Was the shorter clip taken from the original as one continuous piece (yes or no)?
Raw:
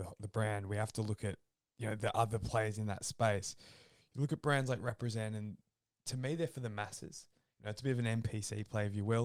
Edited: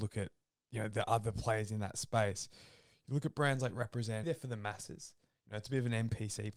no